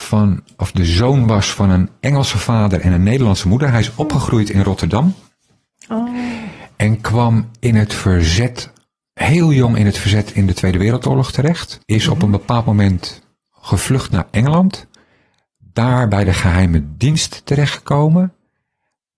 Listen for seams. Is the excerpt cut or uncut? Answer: cut